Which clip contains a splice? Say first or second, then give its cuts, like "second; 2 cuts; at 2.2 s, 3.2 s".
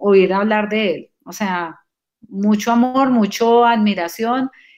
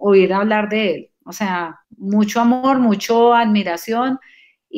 second; 1 cut; at 1.8 s